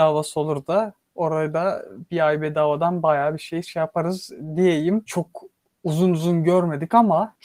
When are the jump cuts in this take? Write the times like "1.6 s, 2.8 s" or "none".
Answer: 5.1 s